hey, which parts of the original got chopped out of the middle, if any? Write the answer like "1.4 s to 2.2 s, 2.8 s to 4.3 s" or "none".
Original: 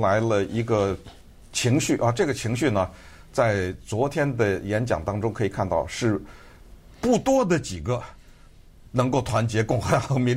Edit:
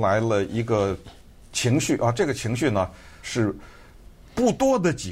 3.2 s to 5.9 s